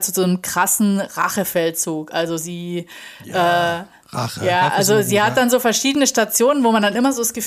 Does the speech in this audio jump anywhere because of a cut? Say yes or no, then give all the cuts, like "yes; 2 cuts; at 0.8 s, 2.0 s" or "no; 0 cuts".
no; 0 cuts